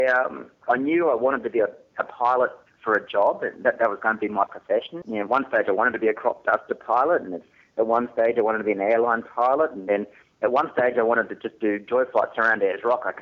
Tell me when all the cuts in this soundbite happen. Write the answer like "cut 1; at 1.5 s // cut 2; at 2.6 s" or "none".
cut 1; at 5.0 s